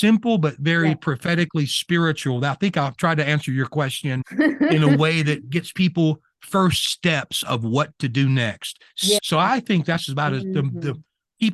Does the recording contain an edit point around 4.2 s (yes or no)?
yes